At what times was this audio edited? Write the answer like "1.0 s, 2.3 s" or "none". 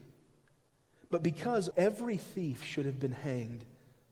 1.7 s